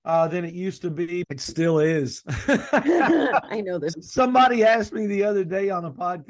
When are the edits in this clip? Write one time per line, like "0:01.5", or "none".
0:01.2
0:03.9